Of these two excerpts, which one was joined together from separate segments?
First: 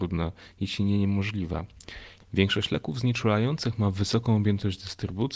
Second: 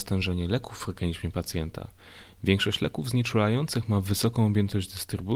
first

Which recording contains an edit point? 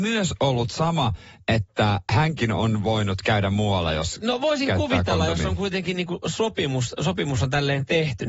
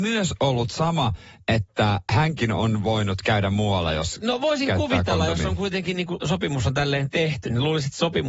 second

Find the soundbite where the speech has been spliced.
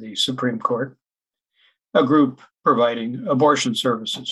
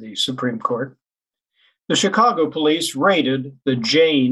first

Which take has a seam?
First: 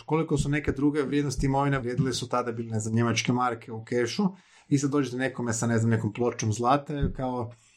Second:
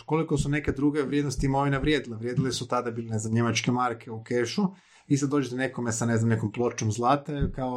first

